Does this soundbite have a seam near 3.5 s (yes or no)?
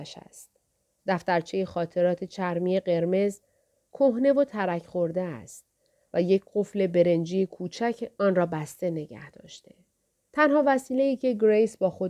no